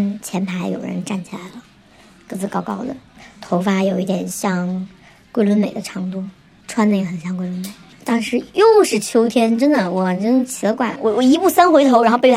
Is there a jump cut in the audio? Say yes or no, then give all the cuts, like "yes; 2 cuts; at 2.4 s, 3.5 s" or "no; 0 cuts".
yes; 3 cuts; at 6.6 s, 7.9 s, 11.0 s